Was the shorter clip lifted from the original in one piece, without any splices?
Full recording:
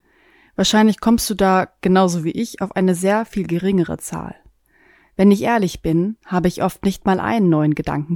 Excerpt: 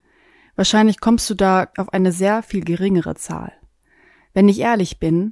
no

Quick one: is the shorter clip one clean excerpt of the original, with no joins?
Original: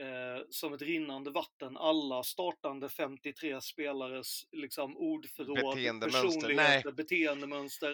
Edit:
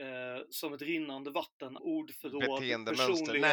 no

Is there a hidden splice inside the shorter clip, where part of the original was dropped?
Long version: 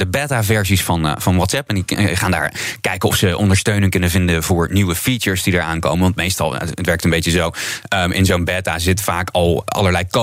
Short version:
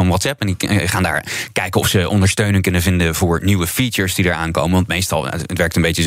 no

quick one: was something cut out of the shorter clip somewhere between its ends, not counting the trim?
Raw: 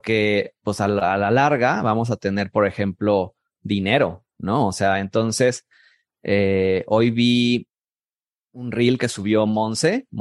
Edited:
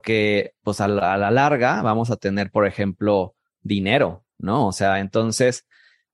no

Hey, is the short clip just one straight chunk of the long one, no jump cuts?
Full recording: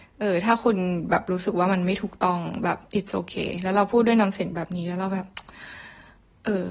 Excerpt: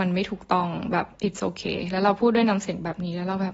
yes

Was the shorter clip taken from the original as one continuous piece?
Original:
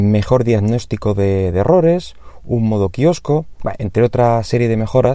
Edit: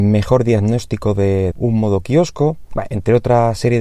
no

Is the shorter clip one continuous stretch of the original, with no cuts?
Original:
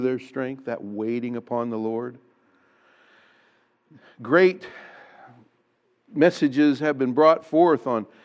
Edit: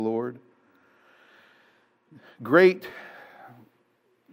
yes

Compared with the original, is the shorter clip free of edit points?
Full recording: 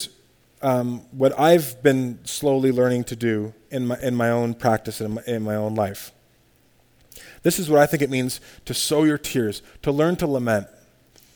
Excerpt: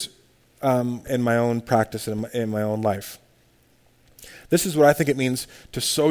no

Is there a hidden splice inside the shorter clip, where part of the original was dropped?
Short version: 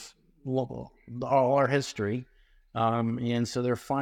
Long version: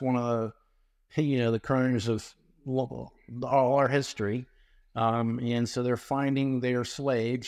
no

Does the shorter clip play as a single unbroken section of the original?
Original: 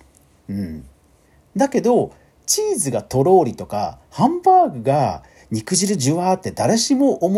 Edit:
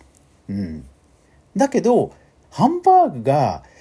no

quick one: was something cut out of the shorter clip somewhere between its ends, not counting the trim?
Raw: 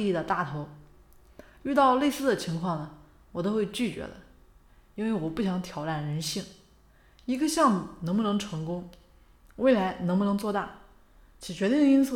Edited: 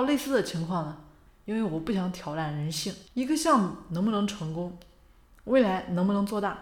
yes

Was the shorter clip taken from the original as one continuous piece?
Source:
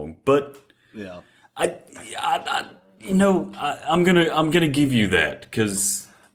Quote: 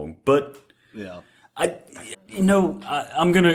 no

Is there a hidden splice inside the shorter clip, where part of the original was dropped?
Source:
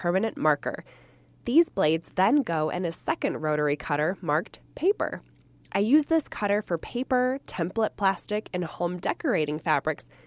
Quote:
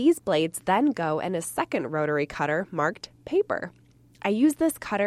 no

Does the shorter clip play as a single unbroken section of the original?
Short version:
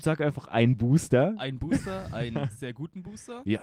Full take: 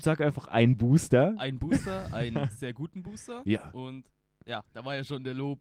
yes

